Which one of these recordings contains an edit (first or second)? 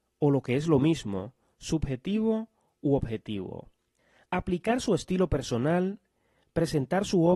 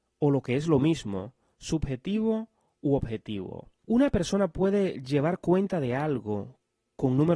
second